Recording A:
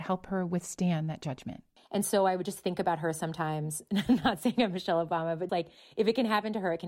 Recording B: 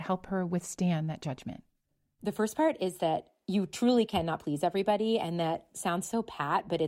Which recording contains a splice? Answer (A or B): A